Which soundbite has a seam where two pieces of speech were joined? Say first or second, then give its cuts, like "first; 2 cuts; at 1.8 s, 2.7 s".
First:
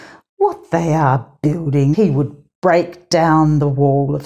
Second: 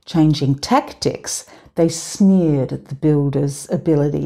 first; 1 cut; at 1.9 s